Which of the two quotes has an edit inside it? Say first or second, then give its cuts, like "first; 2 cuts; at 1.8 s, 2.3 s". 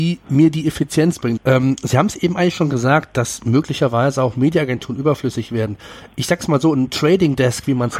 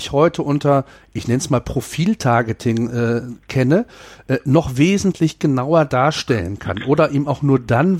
first; 1 cut; at 1.4 s